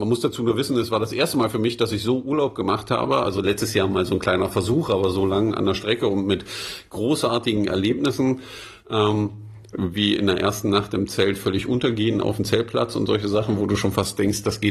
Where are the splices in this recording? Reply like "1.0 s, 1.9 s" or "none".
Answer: 3.2 s